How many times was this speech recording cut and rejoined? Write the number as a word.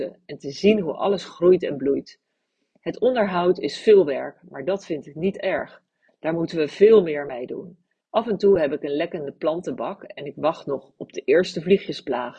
two